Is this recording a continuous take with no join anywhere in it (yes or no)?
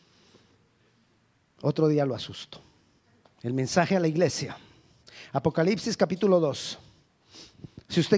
no